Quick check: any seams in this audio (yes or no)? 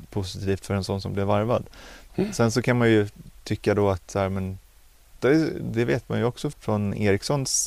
yes